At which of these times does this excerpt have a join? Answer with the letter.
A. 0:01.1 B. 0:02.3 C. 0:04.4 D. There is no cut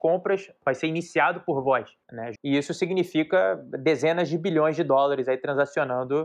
B